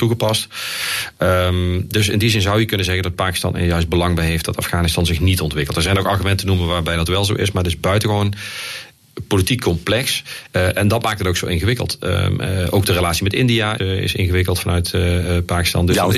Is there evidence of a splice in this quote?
yes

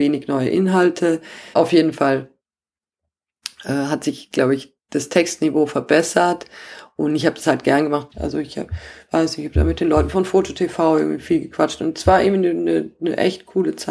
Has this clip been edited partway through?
yes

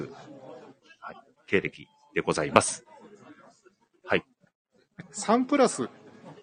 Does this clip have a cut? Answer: yes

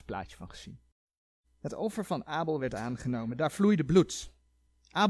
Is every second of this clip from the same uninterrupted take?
no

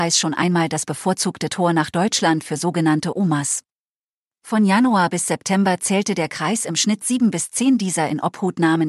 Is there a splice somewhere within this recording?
no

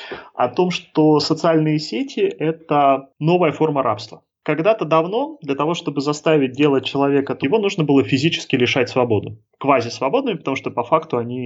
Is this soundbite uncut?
no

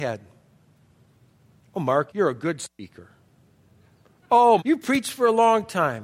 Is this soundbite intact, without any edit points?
no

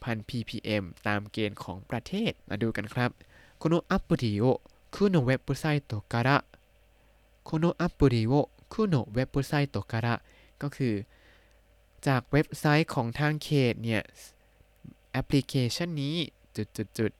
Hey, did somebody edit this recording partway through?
yes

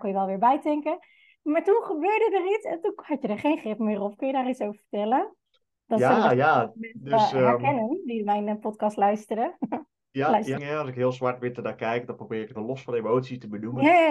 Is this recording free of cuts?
no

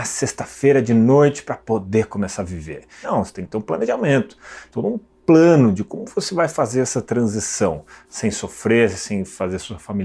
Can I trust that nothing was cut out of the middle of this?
no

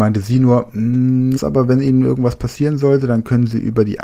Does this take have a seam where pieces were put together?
yes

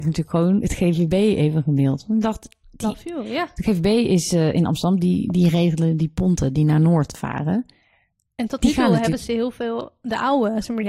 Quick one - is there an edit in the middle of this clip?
no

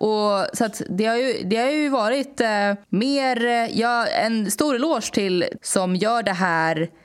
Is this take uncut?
no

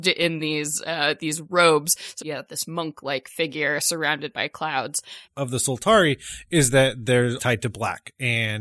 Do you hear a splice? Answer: yes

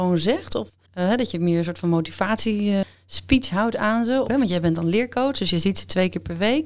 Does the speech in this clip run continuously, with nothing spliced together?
no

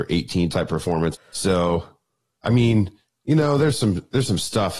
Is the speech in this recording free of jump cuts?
no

